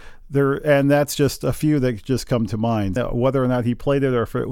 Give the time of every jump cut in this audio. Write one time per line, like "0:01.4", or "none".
0:03.0

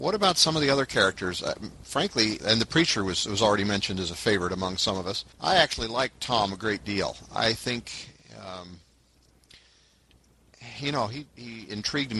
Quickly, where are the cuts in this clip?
0:02.4
0:05.3

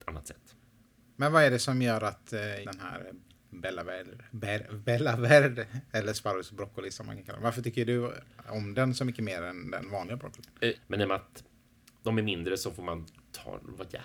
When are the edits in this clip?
0:02.6
0:10.7

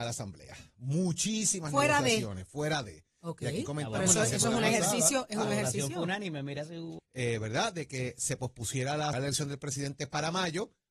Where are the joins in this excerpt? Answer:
0:07.0
0:09.1

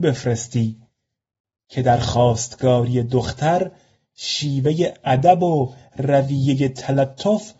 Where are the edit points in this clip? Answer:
none

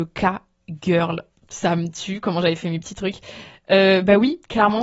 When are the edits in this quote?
none

